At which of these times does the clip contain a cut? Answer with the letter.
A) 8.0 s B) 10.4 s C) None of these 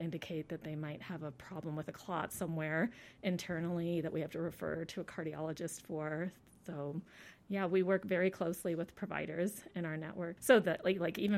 B